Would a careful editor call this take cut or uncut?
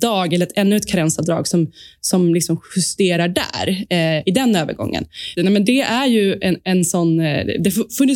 cut